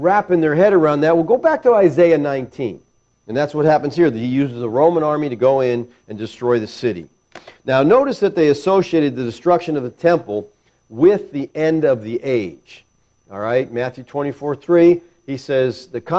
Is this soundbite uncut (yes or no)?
no